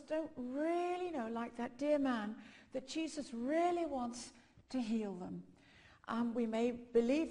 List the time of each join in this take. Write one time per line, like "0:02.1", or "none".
none